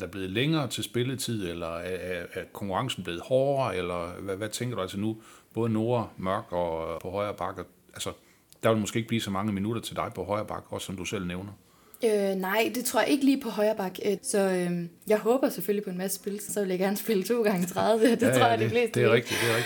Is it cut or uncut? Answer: cut